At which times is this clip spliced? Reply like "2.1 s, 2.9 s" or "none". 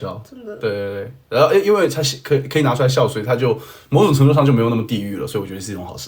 none